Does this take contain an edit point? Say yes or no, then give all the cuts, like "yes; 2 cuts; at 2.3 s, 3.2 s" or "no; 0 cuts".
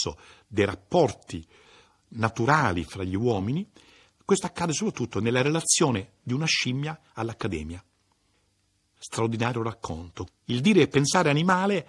yes; 1 cut; at 10.3 s